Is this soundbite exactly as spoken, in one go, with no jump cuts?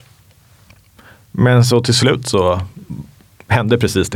yes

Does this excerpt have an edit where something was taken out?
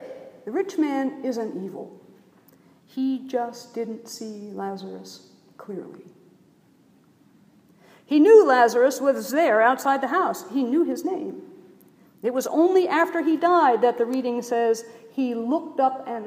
yes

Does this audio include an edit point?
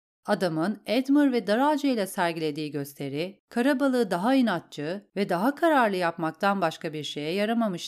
no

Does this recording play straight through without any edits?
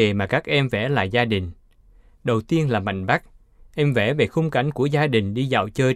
yes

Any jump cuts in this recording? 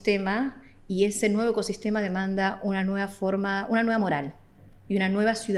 no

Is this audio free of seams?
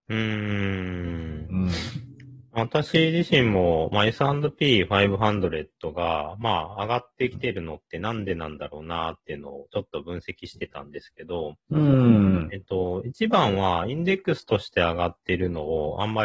yes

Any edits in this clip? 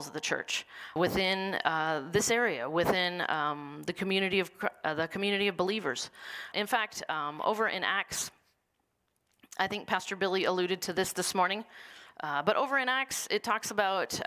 yes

